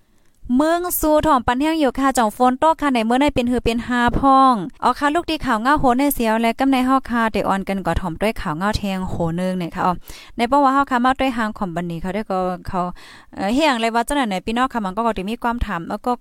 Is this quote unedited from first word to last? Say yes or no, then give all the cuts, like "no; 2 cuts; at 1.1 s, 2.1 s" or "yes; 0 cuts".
no; 1 cut; at 4.8 s